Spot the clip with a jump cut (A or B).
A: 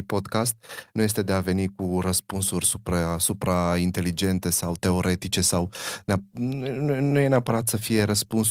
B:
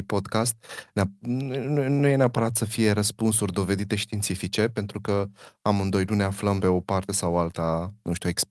B